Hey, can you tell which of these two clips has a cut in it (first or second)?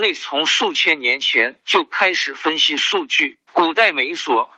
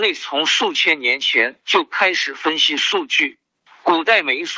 first